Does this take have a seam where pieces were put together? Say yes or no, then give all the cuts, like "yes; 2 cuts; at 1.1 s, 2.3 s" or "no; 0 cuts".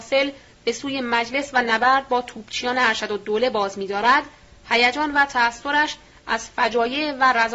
no; 0 cuts